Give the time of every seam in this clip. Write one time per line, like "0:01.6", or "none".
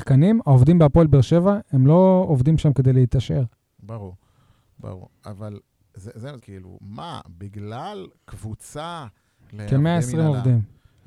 0:06.4
0:09.4